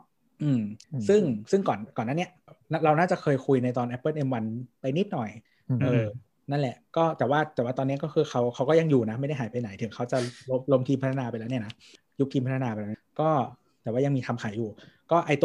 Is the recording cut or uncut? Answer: uncut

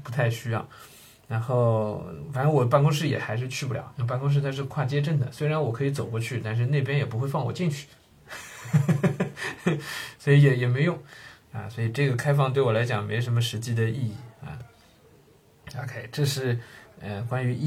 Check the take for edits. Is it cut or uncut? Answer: uncut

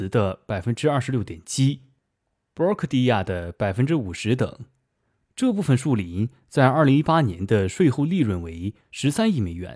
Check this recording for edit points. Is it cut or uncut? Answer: uncut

